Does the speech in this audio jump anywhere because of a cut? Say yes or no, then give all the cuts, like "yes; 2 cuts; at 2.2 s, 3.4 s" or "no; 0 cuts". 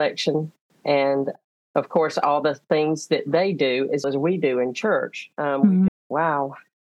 yes; 2 cuts; at 4.0 s, 5.9 s